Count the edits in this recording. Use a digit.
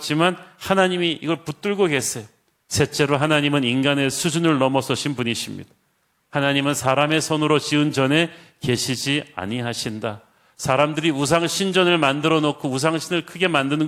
1